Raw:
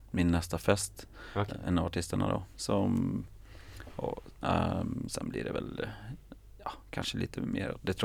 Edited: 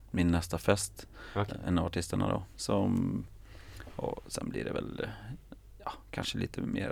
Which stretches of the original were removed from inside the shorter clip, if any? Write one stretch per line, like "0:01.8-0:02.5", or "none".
0:04.3-0:05.1